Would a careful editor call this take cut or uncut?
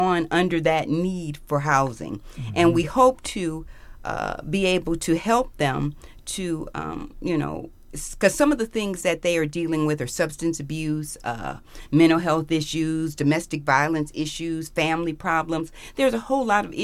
uncut